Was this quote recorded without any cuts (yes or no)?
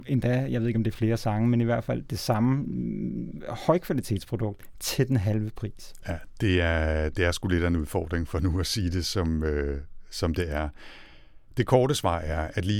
yes